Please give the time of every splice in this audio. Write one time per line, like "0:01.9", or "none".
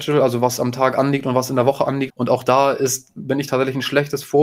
0:02.1